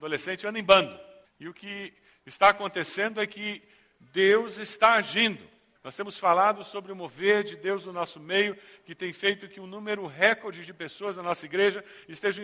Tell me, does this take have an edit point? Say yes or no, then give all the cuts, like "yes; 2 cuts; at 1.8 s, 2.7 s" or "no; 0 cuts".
yes; 2 cuts; at 1.2 s, 5.8 s